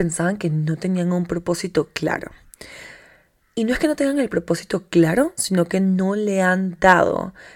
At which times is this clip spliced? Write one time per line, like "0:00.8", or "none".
none